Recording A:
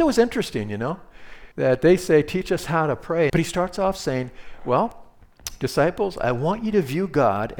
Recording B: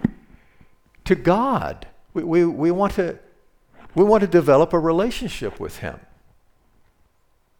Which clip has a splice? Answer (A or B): A